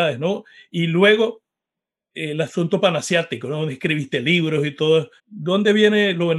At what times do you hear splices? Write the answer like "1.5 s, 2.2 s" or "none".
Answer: 5.2 s